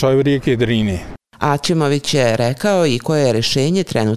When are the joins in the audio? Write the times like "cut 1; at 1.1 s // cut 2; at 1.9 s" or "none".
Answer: none